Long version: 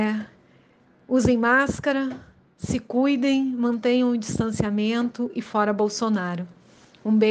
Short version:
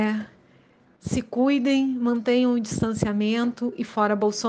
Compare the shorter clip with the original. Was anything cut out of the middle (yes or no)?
yes